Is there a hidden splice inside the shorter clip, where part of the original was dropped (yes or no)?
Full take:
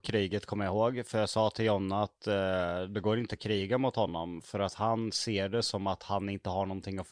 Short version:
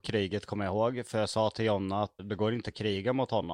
yes